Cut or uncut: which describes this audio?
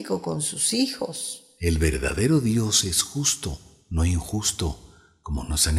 uncut